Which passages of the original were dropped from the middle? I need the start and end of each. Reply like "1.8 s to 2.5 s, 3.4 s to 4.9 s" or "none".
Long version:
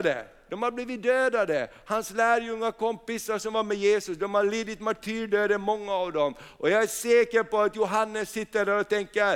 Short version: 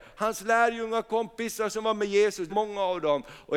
4.2 s to 5.6 s